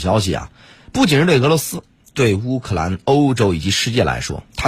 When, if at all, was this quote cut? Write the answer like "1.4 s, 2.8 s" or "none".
none